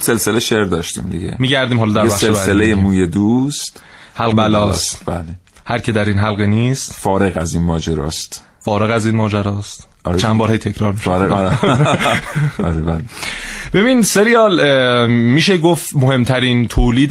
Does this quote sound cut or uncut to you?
cut